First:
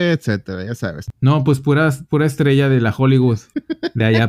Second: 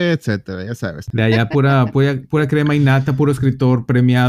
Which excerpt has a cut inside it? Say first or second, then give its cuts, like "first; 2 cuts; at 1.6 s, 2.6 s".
second; 1 cut; at 1.1 s